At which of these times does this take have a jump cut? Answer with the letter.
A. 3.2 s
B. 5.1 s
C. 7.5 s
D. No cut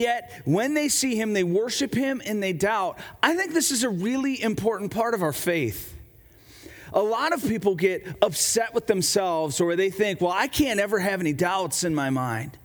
D